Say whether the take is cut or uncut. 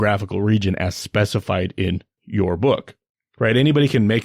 cut